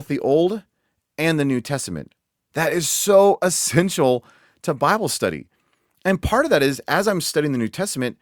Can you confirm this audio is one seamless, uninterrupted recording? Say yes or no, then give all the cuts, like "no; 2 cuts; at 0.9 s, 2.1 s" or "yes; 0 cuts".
yes; 0 cuts